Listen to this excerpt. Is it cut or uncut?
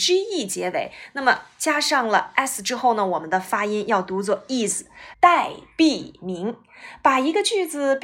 cut